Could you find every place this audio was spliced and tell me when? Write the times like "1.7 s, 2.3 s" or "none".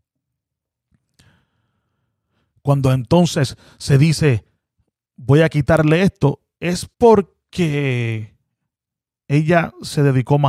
6.9 s